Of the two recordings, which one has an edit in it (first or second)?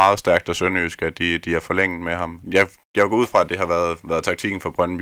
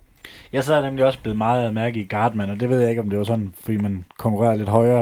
first